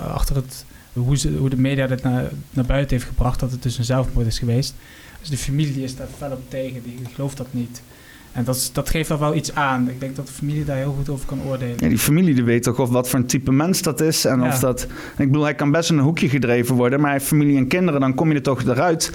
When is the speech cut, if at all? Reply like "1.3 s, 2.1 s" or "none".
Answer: 1.0 s